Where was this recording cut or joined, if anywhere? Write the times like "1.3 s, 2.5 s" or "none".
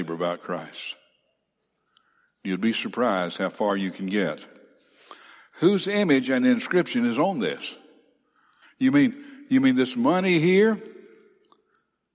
8.6 s